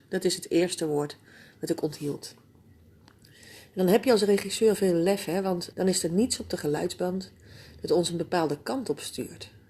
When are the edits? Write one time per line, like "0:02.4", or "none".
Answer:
0:05.7